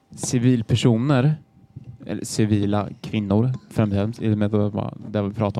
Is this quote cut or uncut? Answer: uncut